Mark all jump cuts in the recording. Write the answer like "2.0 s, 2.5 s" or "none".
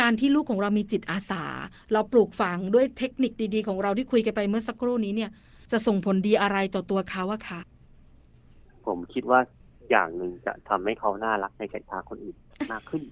7.6 s

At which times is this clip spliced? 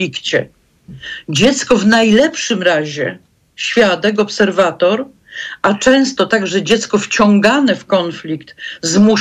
none

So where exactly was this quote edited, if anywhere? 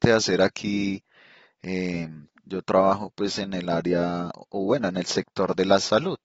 2.3 s

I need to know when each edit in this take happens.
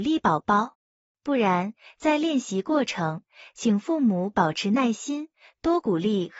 1.0 s

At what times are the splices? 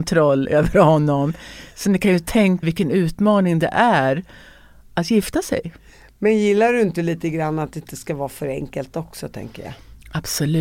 2.6 s

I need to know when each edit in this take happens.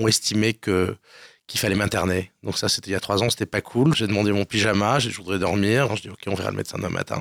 3.9 s, 5.9 s

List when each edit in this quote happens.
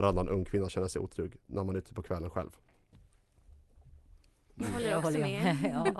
4.5 s

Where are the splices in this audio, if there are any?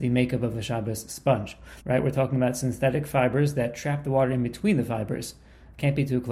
1.8 s

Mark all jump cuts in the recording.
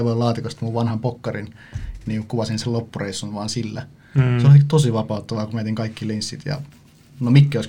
none

